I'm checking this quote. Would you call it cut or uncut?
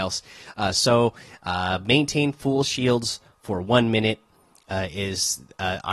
uncut